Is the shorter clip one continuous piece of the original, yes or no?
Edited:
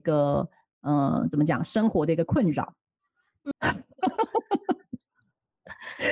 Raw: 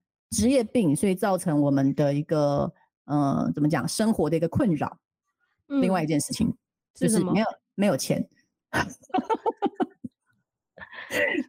no